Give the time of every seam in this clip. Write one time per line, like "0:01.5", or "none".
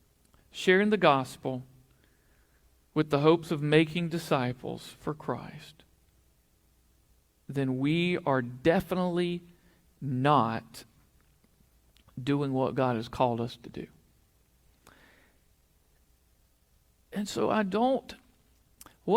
none

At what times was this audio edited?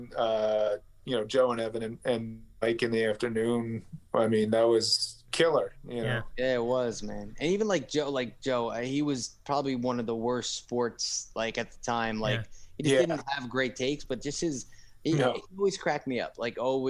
none

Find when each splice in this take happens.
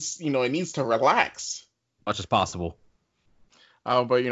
0:02.0

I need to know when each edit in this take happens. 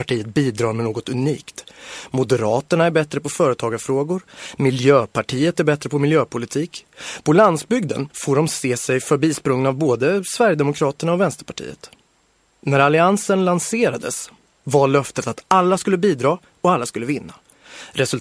0:08.1

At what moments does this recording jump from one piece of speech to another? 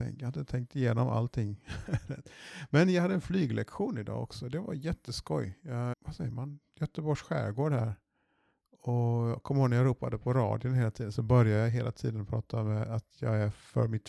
0:05.9

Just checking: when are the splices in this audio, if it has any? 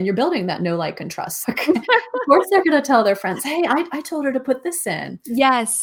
0:01.4

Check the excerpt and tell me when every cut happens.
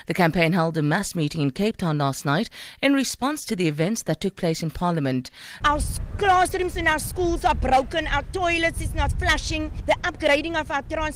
0:05.6

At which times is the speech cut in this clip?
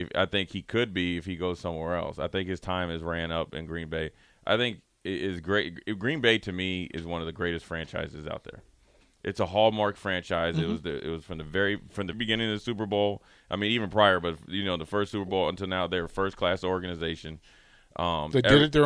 0:12.1

